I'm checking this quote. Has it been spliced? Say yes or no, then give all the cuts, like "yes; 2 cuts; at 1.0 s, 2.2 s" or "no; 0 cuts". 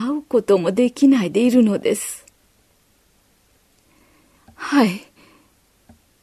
yes; 1 cut; at 4.4 s